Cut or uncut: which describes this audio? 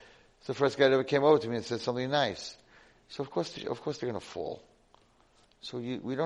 uncut